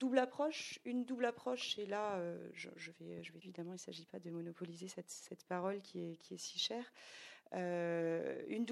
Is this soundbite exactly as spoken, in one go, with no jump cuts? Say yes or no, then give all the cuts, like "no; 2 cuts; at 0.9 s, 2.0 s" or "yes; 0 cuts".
no; 1 cut; at 3.4 s